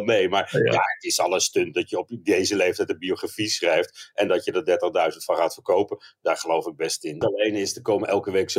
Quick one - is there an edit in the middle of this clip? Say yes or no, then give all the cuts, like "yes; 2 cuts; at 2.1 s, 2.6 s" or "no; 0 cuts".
yes; 1 cut; at 7.2 s